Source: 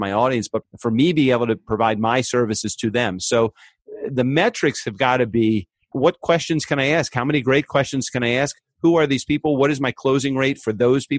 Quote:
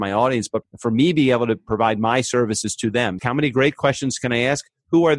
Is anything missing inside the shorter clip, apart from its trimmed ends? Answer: yes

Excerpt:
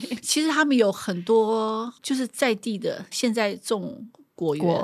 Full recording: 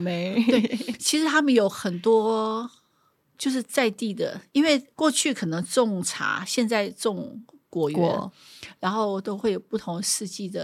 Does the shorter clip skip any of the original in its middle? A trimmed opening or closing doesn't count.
yes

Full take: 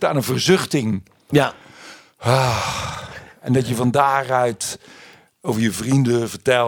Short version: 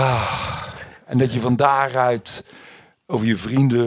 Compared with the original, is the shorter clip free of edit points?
yes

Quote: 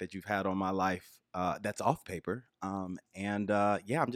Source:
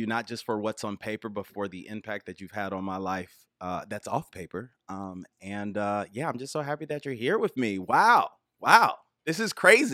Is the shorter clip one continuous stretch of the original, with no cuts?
yes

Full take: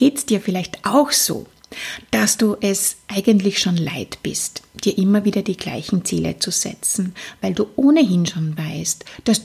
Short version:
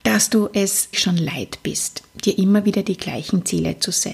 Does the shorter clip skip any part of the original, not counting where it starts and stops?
yes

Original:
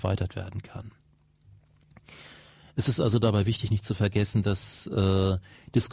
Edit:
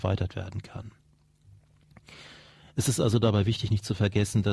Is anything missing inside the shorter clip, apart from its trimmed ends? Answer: no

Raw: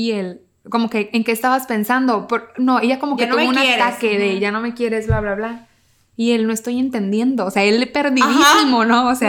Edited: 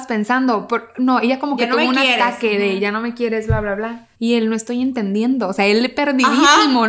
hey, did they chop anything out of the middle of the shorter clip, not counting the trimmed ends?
yes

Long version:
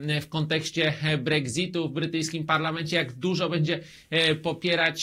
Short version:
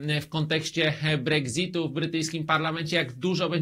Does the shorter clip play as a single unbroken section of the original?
yes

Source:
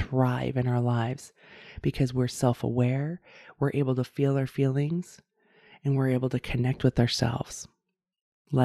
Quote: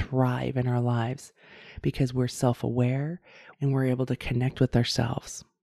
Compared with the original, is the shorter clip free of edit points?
no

